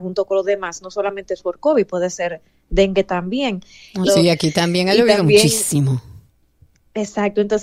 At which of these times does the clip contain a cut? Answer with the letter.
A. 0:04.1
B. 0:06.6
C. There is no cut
A